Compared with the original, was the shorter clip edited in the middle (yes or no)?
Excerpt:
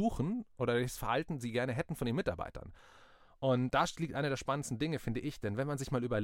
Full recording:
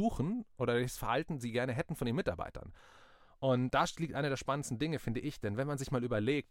no